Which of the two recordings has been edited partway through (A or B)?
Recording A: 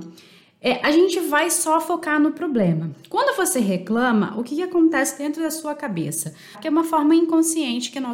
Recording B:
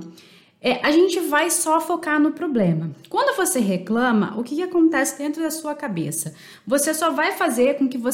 A